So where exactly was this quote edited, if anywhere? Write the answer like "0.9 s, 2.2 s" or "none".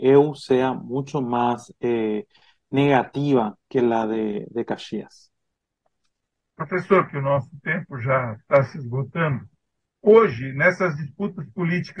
7.1 s